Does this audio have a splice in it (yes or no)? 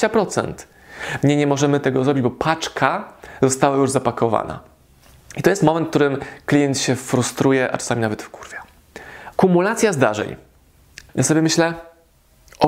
yes